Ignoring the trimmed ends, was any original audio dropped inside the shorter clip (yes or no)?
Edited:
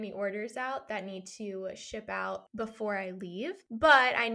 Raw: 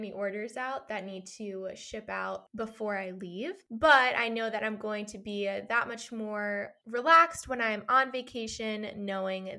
no